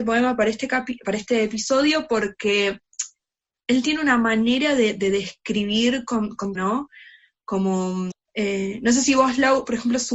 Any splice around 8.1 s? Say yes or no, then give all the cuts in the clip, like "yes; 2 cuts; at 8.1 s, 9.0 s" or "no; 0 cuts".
yes; 2 cuts; at 6.5 s, 8.1 s